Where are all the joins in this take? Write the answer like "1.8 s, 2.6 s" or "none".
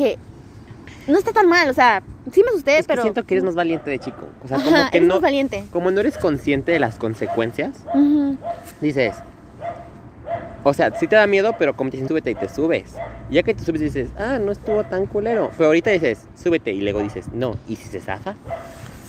12.1 s